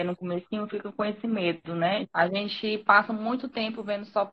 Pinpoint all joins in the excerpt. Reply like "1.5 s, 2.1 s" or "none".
2.0 s